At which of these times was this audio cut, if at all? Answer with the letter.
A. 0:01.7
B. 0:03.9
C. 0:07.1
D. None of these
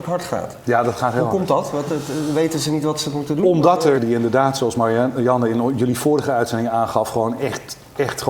B